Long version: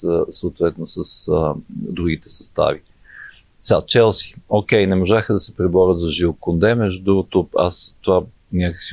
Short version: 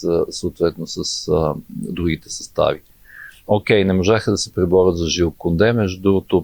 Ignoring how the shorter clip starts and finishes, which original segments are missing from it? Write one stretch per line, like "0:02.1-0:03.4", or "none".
0:03.4-0:04.4